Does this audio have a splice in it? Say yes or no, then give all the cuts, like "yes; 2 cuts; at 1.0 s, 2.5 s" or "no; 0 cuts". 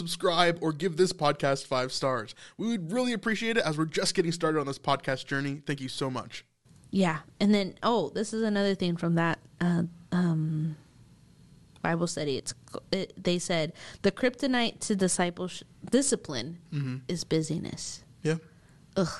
no; 0 cuts